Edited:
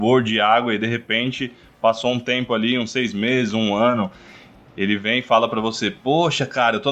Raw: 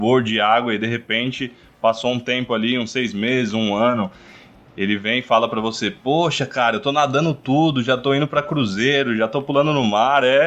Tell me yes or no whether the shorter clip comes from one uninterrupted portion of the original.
yes